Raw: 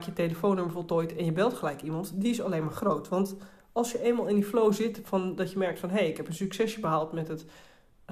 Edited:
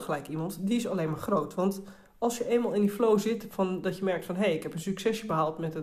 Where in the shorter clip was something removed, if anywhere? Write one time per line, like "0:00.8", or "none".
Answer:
none